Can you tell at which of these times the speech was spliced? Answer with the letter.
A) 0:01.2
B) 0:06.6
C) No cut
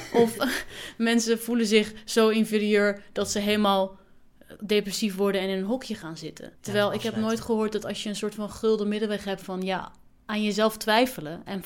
B